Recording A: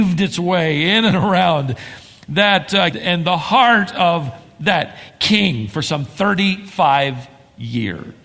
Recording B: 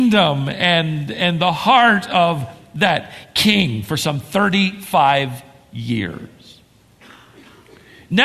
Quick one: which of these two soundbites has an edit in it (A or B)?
A